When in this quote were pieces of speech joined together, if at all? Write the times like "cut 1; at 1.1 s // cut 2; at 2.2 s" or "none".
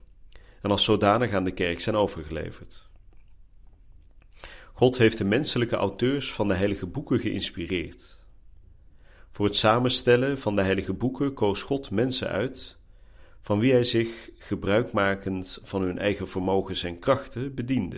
none